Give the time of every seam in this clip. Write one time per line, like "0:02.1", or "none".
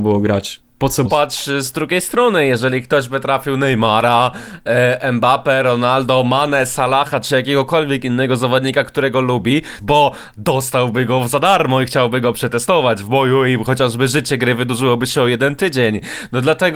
0:01.0
0:09.8